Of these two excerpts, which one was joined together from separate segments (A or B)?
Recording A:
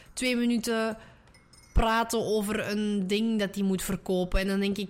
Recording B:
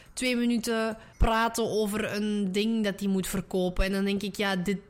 B